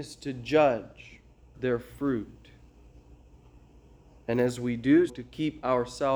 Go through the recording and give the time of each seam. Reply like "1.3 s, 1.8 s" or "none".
1.5 s, 5.1 s